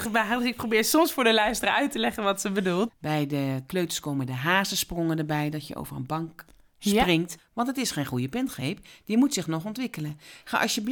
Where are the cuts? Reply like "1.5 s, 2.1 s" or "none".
2.9 s, 7.4 s